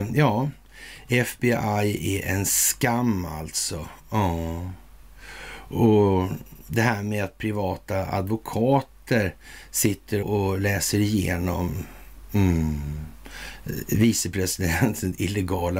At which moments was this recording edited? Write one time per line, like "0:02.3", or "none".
0:10.2